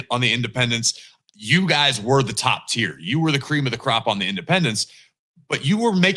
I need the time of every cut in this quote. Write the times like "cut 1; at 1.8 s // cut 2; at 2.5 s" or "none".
none